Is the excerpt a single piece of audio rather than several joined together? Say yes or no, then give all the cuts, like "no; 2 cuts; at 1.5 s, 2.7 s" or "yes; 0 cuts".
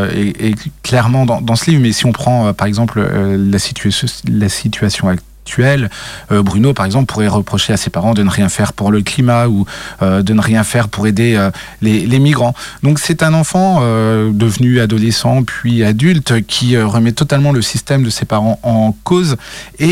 yes; 0 cuts